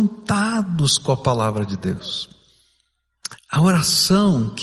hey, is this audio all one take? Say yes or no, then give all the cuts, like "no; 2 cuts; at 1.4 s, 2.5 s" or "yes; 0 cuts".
no; 1 cut; at 3.4 s